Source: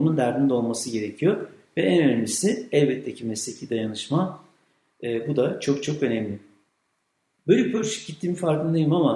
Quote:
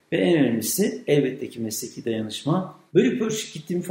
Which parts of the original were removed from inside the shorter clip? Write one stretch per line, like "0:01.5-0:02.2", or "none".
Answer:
0:04.5-0:07.4

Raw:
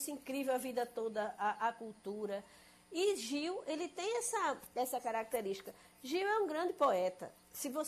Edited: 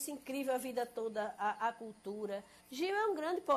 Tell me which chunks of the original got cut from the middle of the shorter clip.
0:02.6-0:05.9

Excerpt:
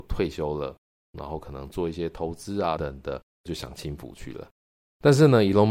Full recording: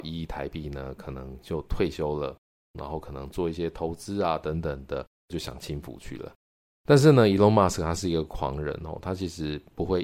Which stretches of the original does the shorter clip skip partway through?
0:04.4-0:04.6

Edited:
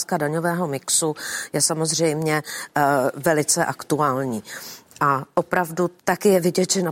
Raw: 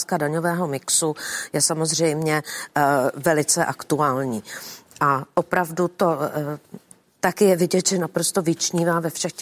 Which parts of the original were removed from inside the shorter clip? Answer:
0:06.0-0:07.2

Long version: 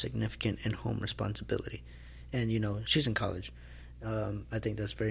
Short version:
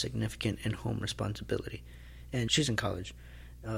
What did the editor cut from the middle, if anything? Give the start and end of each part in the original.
0:02.5-0:02.8

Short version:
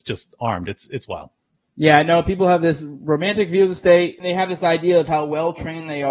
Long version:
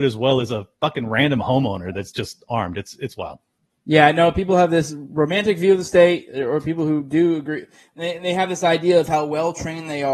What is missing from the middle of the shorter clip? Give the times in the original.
0:06.3-0:08.2

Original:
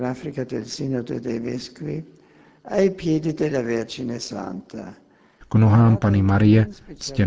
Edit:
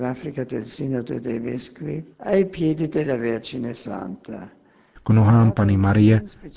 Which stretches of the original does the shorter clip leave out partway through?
0:02.1-0:02.6

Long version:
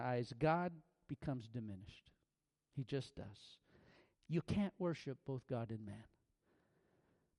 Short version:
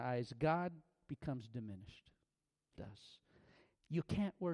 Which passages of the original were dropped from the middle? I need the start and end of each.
0:02.8-0:03.1

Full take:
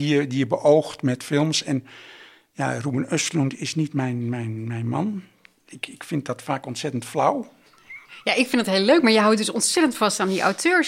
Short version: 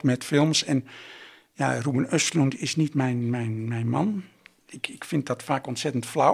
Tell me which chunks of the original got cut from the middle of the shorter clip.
none

